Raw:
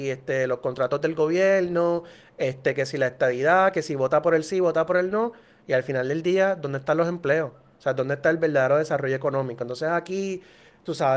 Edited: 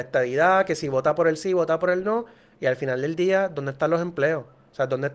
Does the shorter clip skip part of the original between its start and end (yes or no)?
no